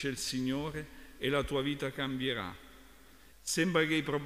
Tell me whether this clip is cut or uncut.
cut